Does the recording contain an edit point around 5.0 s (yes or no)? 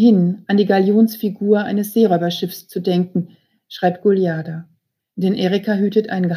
yes